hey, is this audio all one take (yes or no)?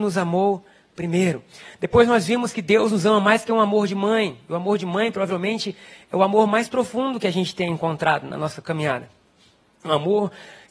yes